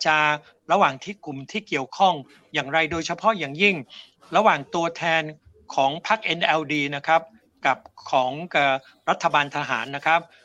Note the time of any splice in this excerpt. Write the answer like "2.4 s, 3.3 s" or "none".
none